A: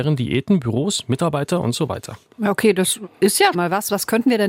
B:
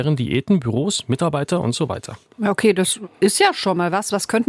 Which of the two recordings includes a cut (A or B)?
A